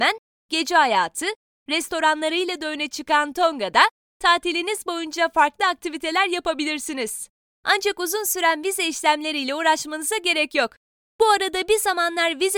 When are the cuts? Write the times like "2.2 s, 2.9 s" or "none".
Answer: 7.5 s, 11.1 s

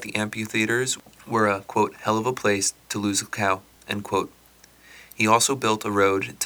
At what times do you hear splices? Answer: none

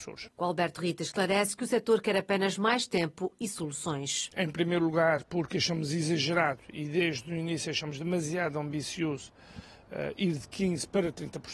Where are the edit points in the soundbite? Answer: 4.3 s

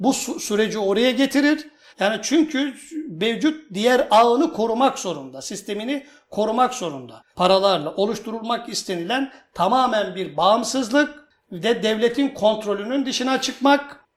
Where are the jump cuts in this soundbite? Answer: 1.9 s, 7.3 s

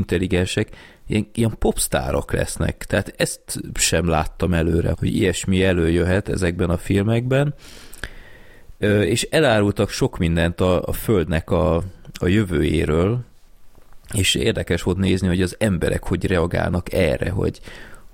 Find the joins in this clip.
4.9 s

